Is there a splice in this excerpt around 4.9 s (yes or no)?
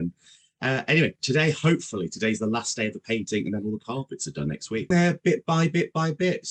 yes